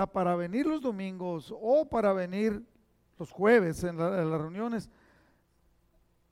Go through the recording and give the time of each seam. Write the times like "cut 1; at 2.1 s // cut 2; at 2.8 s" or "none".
none